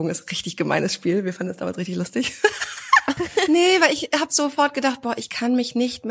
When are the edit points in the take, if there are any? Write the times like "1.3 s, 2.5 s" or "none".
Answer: 3.2 s